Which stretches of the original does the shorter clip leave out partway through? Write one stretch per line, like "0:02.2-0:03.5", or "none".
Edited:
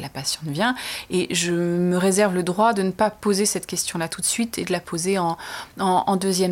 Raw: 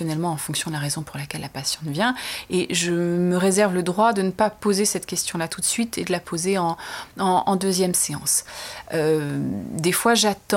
none